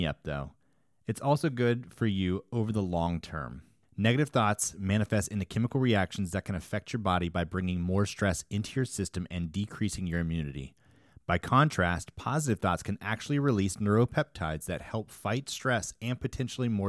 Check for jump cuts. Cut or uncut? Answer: cut